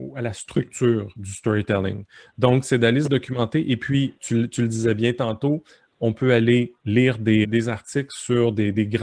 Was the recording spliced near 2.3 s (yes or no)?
no